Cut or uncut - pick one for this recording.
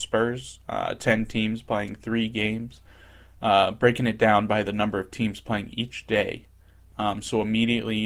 cut